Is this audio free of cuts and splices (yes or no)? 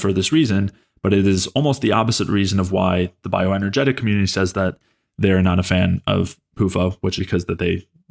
no